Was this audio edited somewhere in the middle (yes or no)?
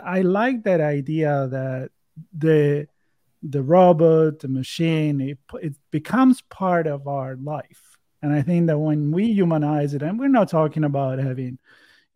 no